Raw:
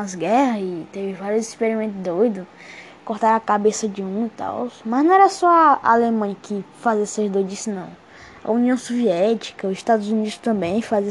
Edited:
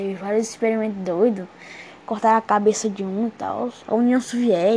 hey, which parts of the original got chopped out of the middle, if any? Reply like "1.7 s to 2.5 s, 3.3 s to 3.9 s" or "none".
4.8 s to 8.4 s